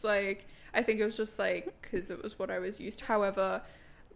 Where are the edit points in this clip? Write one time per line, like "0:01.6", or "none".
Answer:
0:03.0